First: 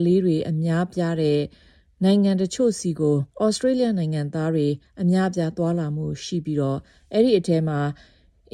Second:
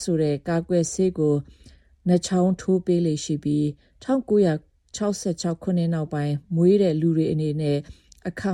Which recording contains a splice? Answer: first; 1 cut; at 3.3 s

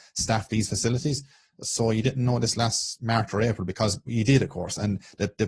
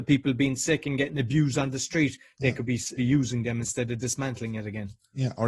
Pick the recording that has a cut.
second; 1 cut; at 3.0 s

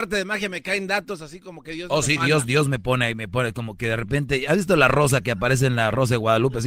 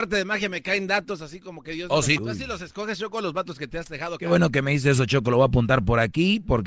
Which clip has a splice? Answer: second; 1 cut; at 2.2 s

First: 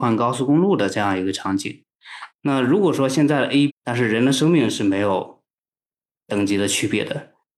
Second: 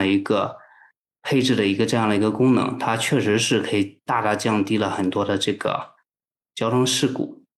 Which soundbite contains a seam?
first; 2 cuts; at 2.3 s, 3.7 s

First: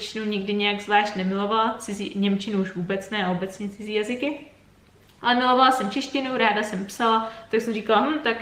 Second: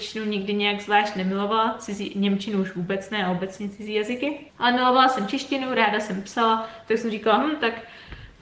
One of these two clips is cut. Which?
second; 1 cut; at 4.5 s

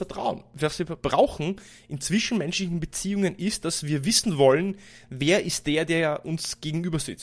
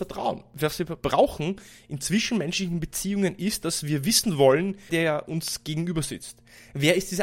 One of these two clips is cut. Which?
second; 1 cut; at 4.9 s

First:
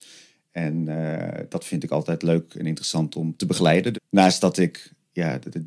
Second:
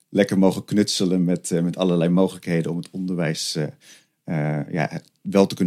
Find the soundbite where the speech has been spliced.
first; 1 cut; at 3.9 s

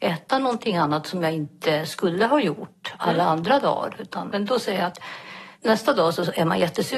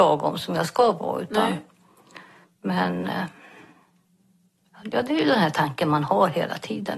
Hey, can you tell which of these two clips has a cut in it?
first; 2 cuts; at 4.3 s, 5.5 s

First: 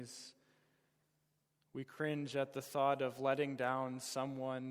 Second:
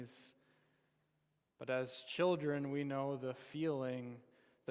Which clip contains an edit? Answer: second; 1 cut; at 1.4 s

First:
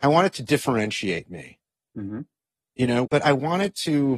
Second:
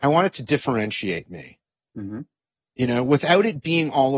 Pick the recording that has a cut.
first; 1 cut; at 3.1 s

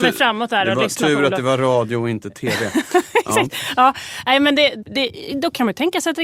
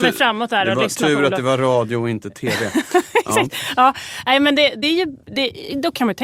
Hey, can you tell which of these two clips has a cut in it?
first; 1 cut; at 4.8 s

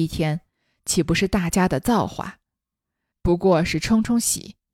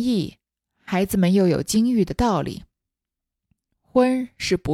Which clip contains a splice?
first; 1 cut; at 3.1 s

